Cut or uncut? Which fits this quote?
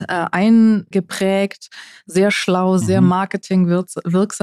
cut